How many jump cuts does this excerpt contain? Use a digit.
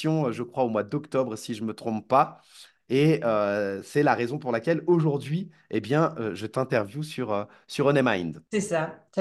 0